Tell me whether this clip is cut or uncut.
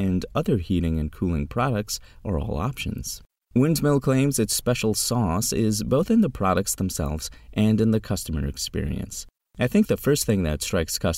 uncut